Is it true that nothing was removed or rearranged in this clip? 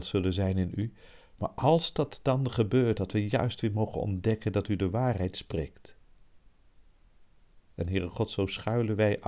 yes; 0 cuts

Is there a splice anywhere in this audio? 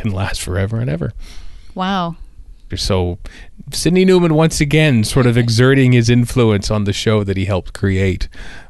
yes; 1 cut; at 2.7 s

